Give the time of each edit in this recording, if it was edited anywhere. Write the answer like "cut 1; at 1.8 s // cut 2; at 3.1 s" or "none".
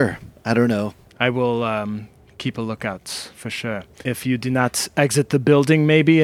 cut 1; at 4.0 s